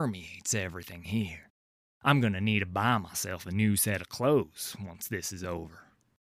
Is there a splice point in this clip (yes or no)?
no